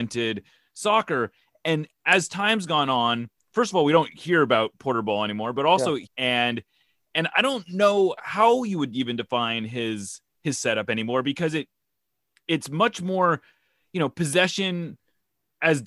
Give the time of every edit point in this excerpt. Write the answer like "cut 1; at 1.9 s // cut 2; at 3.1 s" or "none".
cut 1; at 6.1 s